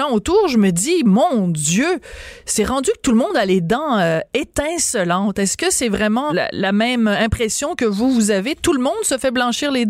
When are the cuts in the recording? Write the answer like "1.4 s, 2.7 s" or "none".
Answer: 6.3 s